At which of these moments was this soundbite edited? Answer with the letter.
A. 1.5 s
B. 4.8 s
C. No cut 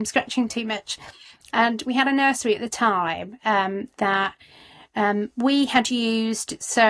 A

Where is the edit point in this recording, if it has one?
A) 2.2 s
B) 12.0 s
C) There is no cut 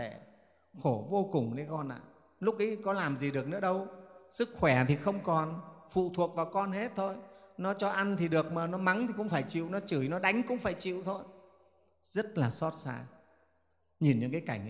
C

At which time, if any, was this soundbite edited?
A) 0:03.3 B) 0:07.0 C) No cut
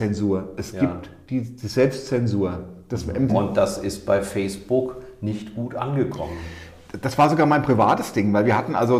A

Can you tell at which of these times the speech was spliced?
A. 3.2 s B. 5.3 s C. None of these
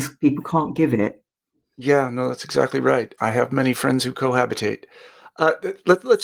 A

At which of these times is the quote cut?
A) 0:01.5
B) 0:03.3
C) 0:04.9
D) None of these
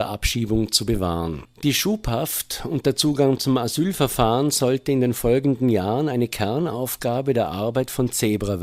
A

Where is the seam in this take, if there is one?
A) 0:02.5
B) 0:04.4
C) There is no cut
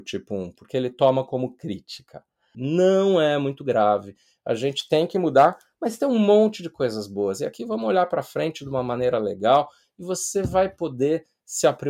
A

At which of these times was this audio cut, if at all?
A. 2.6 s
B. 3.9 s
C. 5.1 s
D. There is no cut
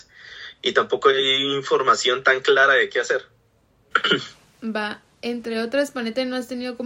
B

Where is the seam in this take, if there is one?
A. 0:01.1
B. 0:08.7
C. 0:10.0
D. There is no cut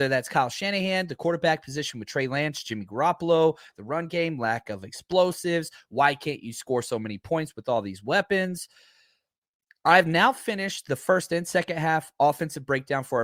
D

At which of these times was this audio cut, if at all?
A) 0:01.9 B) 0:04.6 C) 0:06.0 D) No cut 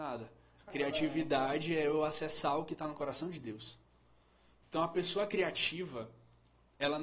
B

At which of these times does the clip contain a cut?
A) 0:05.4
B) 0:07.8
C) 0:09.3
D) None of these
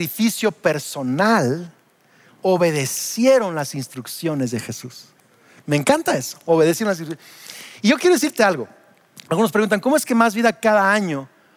D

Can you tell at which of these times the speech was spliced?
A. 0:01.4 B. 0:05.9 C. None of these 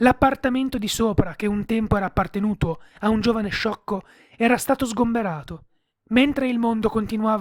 B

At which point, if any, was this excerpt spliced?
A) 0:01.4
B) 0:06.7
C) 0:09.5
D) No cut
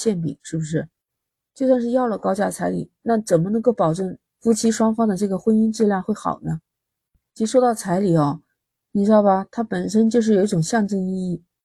D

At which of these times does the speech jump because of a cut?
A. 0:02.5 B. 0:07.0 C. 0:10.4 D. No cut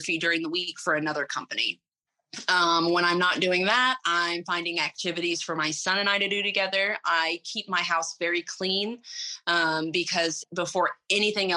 C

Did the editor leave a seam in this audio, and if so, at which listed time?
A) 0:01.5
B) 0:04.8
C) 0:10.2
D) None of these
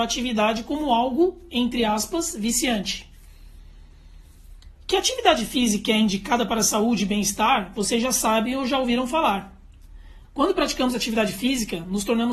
C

